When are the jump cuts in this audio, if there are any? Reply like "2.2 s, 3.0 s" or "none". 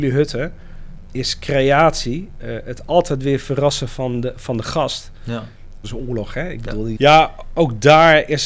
5.8 s, 7.0 s